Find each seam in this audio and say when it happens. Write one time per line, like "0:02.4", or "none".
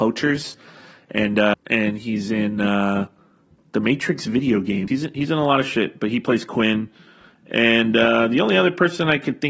0:01.5
0:04.9